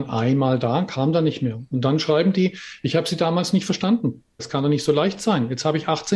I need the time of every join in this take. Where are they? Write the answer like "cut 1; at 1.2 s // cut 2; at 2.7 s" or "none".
cut 1; at 4.4 s